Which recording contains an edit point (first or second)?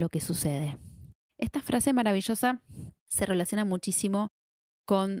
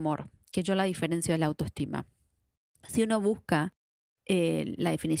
first